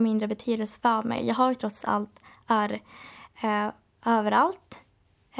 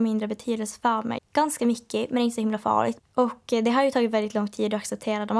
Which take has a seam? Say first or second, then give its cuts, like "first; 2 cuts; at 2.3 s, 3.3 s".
second; 2 cuts; at 1.2 s, 3.0 s